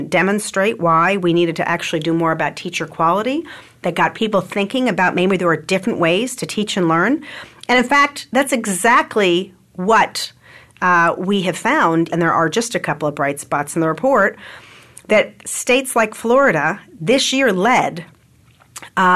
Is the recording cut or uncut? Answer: cut